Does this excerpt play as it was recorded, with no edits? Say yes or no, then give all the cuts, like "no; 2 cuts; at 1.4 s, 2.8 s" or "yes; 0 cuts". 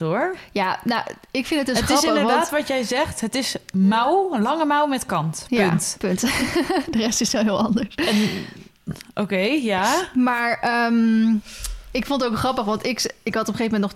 yes; 0 cuts